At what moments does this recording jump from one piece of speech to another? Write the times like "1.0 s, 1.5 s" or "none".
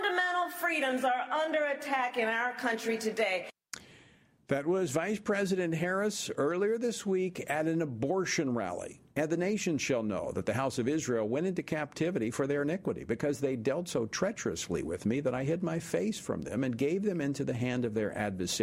9.1 s

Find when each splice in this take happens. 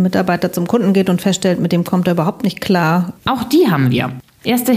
3.2 s

